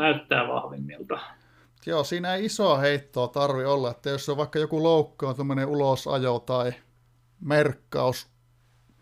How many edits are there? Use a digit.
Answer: 0